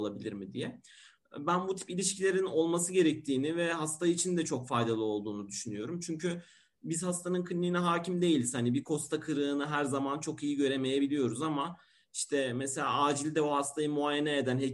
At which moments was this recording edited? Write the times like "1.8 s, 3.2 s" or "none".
none